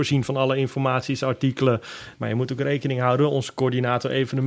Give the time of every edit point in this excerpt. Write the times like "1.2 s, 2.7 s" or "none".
2.1 s